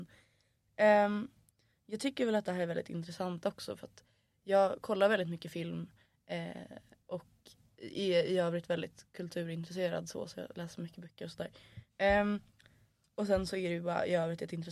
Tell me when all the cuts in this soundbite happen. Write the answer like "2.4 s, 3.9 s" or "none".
none